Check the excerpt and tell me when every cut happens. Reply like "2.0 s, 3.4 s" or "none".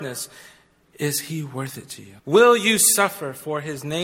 2.2 s